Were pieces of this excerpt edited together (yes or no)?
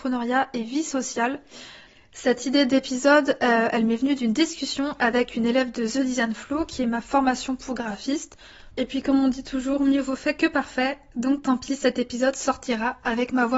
yes